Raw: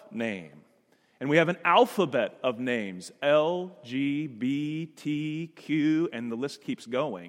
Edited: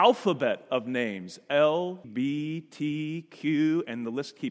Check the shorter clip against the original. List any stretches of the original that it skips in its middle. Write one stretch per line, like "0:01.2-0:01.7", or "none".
0:03.8-0:04.3